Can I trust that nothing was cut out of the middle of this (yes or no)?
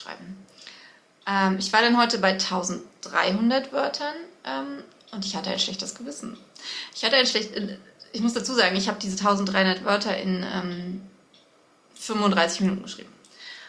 yes